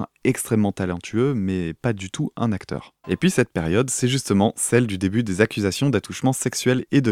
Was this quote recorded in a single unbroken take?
no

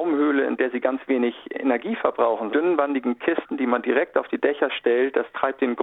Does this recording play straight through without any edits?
no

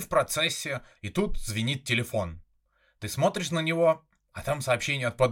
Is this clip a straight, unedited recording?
no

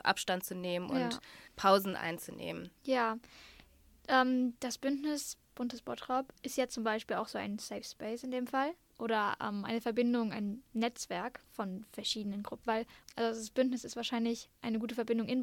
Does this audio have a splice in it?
yes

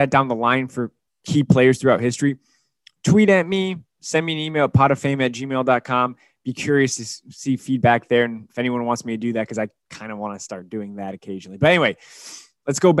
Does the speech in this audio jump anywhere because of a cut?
no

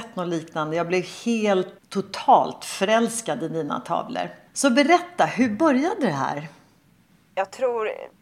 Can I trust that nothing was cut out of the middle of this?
no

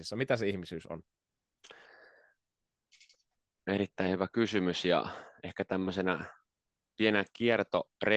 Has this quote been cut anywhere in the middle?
no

